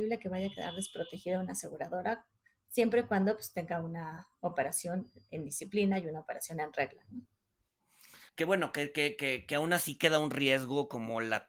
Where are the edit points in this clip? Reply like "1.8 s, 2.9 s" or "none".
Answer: 8.3 s